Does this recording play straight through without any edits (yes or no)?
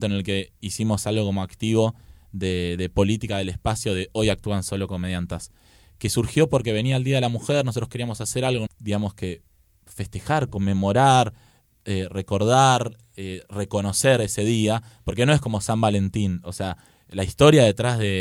no